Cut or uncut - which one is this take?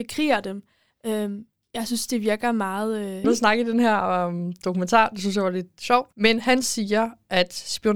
cut